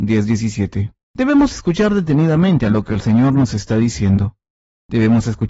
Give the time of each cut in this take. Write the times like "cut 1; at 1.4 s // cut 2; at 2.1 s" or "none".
cut 1; at 1.0 s